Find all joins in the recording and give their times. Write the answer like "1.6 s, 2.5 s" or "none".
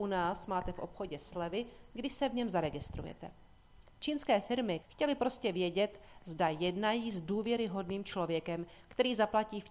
4.8 s